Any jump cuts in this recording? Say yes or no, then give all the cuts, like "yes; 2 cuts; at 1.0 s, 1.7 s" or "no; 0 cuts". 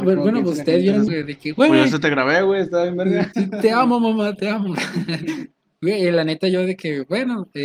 yes; 1 cut; at 1.1 s